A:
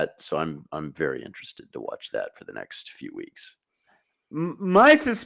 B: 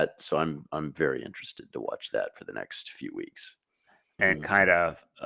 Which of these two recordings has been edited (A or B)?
B